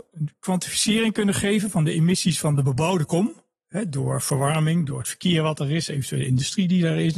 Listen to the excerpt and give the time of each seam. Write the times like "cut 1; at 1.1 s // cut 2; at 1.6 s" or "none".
none

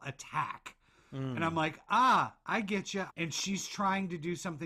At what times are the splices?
cut 1; at 3.1 s

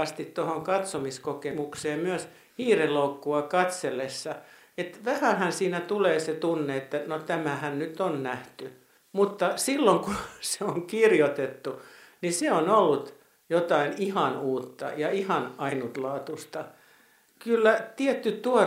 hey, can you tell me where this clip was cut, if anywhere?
none

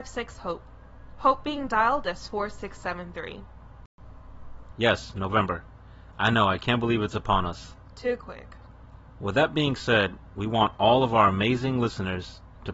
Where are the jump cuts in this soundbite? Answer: cut 1; at 4.7 s

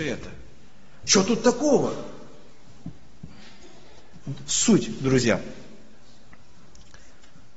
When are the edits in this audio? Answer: cut 1; at 1.0 s

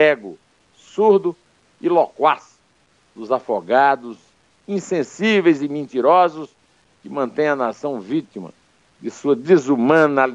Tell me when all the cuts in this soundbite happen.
none

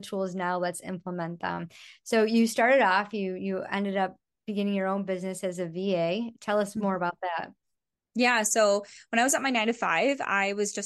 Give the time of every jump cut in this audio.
none

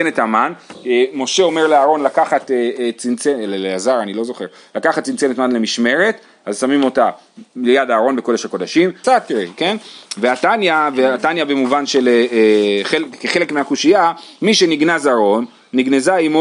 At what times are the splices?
cut 1; at 9.0 s

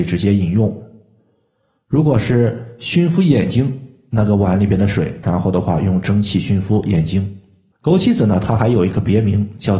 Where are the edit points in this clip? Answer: cut 1; at 5.2 s // cut 2; at 7.7 s

